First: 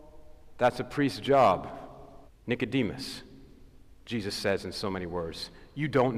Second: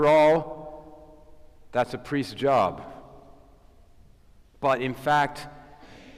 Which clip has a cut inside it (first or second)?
first